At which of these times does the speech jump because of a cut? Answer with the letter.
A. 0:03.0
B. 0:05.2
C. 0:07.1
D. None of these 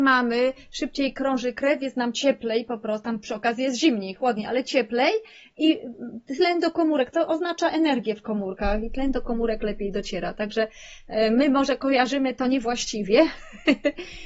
D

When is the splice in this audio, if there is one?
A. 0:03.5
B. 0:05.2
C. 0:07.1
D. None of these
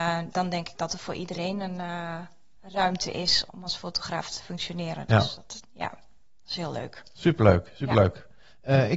A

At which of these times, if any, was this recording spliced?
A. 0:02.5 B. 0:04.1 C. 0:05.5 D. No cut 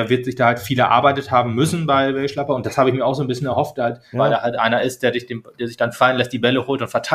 B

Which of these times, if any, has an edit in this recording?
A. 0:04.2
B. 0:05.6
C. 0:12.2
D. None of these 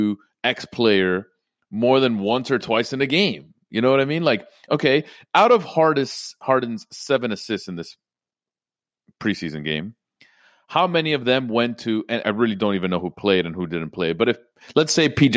C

